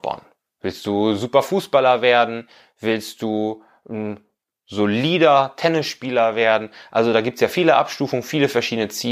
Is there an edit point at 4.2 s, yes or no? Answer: no